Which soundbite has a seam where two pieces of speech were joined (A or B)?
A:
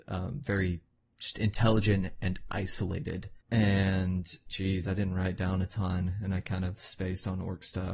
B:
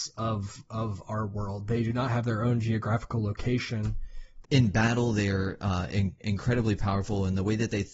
B